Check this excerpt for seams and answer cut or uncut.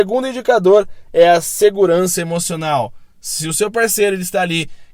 uncut